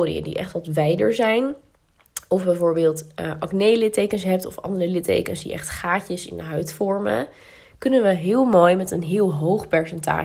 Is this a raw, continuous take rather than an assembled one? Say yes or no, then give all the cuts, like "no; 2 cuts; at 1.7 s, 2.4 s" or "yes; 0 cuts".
yes; 0 cuts